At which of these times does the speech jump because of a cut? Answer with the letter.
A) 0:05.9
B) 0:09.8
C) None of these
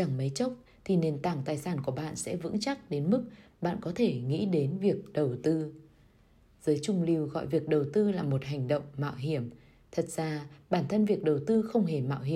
C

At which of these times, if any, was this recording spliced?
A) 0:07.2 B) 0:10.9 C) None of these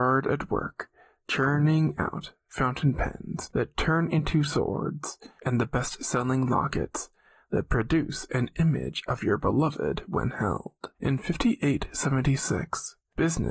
B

